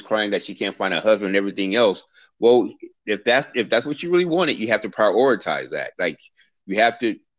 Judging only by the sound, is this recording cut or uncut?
uncut